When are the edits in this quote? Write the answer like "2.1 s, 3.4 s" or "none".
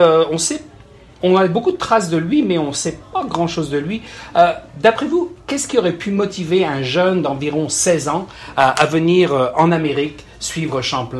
none

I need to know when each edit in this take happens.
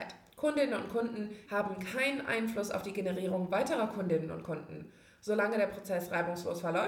1.5 s

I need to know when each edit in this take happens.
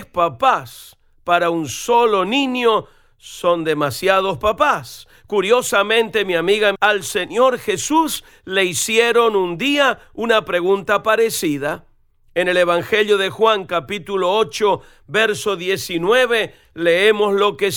6.7 s

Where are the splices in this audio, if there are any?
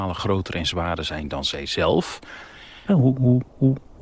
2.9 s

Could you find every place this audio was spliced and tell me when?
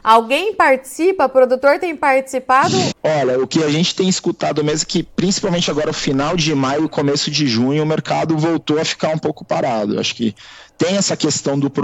2.9 s

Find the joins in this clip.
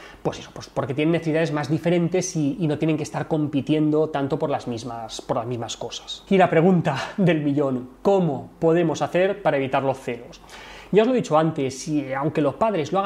none

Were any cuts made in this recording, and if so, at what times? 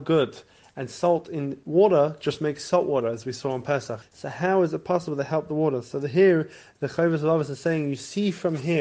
4.0 s

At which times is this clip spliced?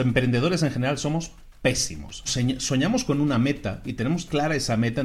2.3 s

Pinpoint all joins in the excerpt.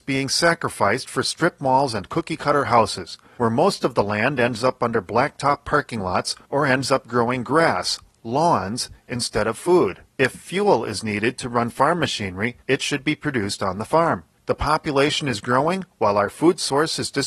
10.1 s, 14.3 s

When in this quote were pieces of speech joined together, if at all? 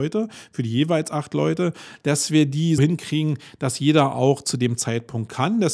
2.8 s

